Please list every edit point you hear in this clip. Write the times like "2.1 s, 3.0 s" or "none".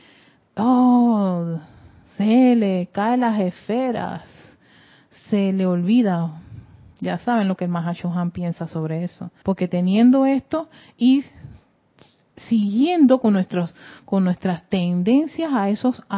9.4 s

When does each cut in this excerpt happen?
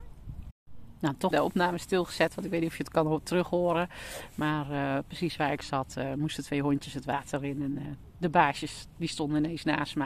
1.3 s

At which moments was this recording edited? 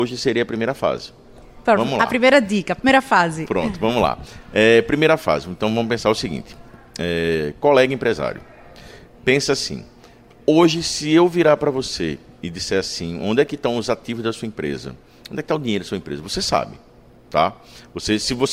1.6 s

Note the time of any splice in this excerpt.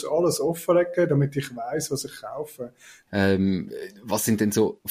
3.1 s

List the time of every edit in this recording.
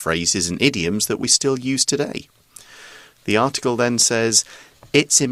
none

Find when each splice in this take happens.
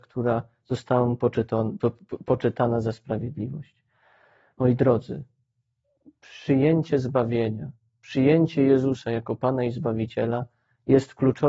none

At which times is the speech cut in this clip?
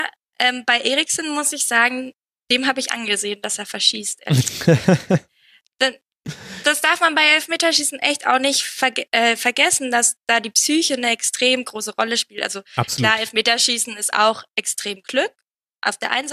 6.6 s

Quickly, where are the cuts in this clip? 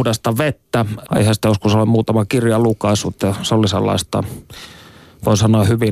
1.1 s

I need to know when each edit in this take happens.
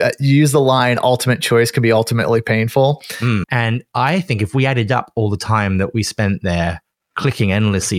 3.4 s

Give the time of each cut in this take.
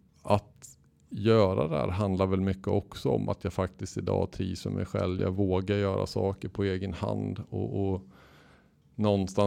5.2 s

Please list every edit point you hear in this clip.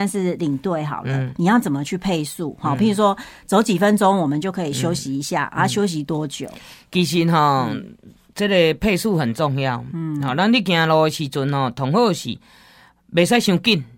none

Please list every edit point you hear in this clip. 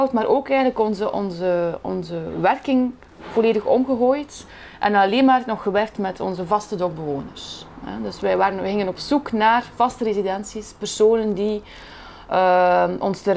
none

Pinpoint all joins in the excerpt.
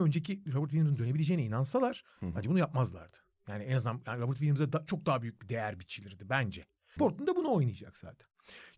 7.0 s

